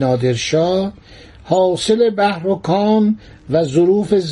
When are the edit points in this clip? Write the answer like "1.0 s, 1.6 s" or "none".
none